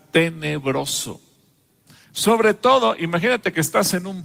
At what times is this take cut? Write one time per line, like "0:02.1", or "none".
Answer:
none